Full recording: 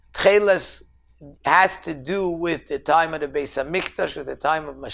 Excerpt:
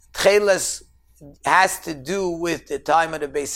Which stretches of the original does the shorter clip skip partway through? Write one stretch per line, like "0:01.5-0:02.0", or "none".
none